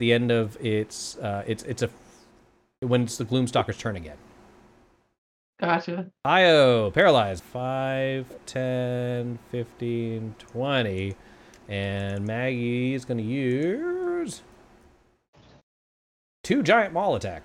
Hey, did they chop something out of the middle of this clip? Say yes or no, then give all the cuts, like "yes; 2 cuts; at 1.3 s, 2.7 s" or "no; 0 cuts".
yes; 1 cut; at 7.4 s